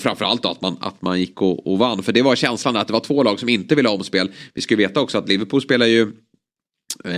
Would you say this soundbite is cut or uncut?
uncut